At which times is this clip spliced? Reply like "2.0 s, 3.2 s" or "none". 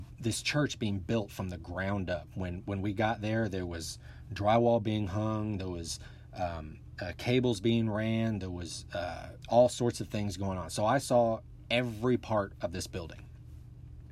9.4 s